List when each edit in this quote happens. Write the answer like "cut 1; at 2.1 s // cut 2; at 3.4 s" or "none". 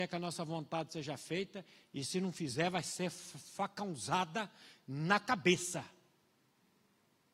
none